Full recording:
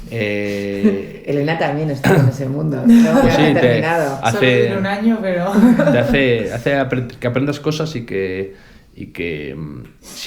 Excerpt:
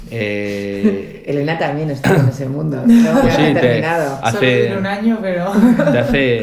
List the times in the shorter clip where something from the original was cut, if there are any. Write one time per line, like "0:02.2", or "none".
none